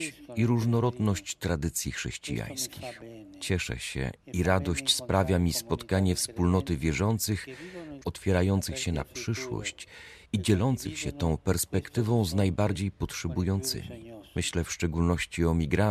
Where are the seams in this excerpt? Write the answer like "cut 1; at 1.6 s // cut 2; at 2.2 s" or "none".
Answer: cut 1; at 8.0 s